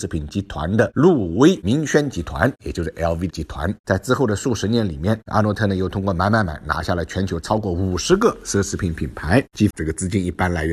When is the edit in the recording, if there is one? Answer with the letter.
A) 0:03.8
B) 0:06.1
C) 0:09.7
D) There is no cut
C